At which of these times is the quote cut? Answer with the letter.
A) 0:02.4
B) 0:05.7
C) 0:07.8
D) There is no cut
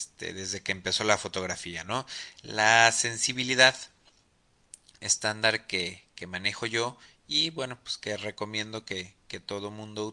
D